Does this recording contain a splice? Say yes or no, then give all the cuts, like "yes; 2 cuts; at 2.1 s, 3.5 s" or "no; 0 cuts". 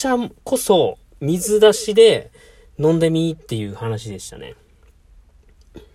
no; 0 cuts